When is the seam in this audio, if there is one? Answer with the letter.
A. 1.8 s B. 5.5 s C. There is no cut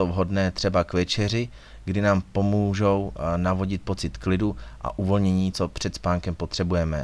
B